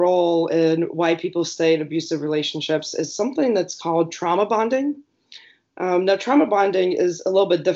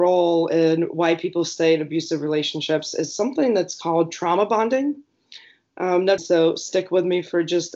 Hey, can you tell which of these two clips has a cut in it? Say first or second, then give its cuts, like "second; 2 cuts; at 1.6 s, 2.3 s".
second; 1 cut; at 6.2 s